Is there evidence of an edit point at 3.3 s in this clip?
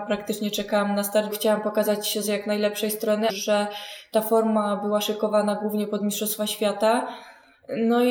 yes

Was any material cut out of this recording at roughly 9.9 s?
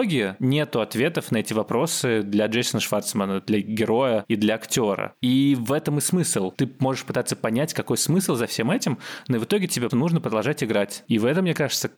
yes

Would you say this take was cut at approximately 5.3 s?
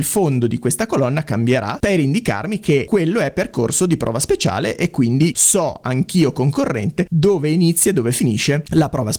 no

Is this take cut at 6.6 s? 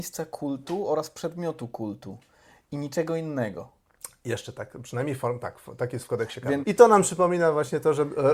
yes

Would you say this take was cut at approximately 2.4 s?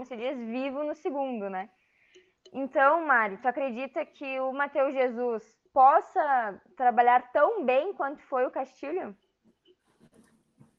no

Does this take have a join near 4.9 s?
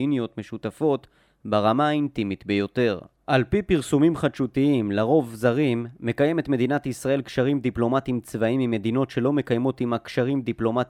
no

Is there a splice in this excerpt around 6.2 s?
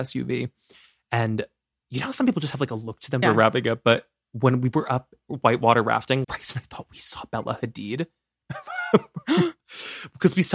yes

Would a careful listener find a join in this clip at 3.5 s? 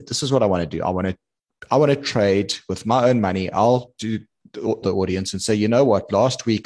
no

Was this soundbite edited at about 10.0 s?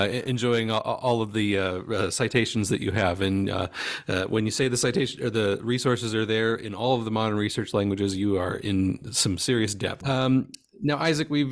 yes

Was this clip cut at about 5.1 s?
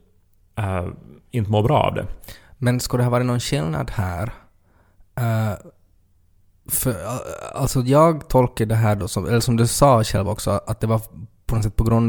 no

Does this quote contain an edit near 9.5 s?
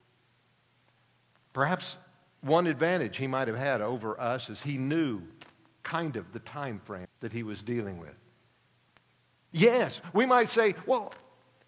yes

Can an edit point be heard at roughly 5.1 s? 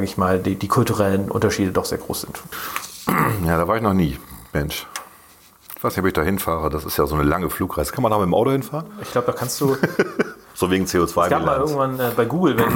no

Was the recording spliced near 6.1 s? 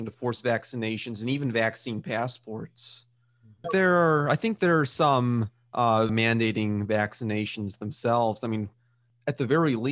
yes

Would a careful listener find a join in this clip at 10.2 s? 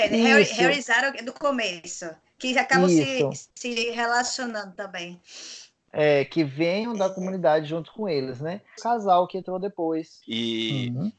yes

